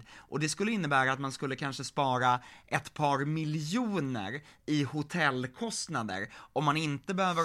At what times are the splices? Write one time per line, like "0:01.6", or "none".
none